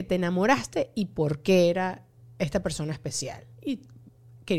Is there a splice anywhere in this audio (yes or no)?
yes